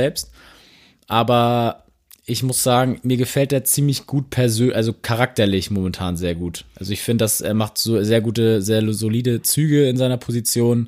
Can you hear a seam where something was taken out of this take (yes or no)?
no